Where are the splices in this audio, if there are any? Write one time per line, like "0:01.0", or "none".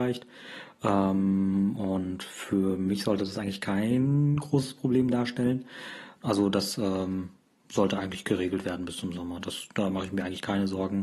0:06.2

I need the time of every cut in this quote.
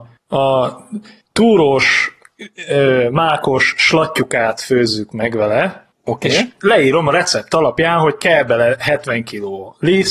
none

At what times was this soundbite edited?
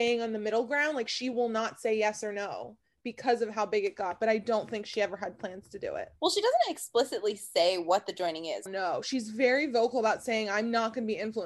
0:06.2
0:08.7

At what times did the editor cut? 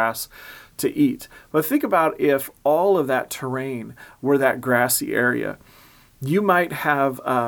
none

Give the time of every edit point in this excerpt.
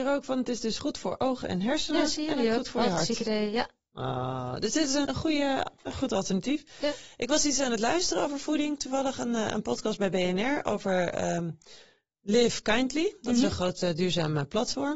0:05.1

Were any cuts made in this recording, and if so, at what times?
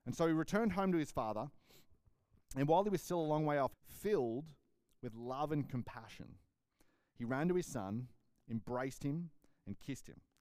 0:03.7

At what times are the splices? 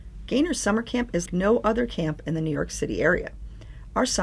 0:01.3

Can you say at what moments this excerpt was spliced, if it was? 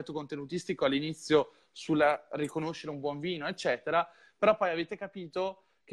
none

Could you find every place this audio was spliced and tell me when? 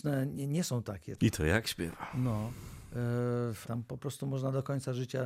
0:01.2
0:03.6

